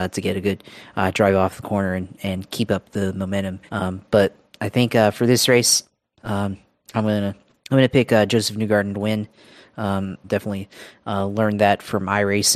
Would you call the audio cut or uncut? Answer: cut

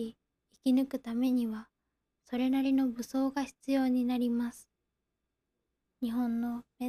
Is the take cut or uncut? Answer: cut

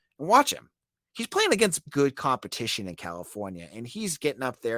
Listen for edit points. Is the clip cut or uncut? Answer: cut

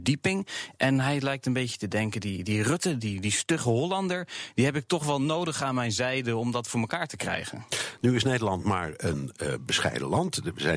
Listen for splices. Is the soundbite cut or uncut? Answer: uncut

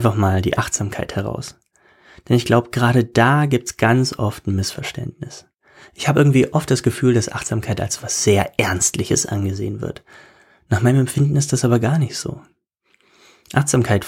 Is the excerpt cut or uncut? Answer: uncut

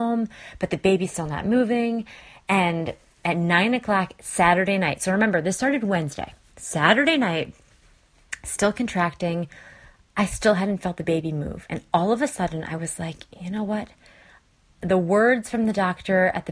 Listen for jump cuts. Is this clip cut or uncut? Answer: uncut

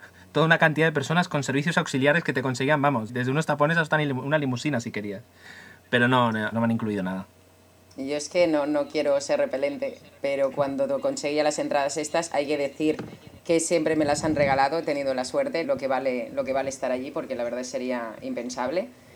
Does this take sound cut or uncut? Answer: cut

